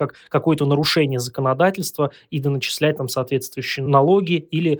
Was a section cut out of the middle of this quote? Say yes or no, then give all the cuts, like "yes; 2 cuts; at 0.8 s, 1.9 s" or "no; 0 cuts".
no; 0 cuts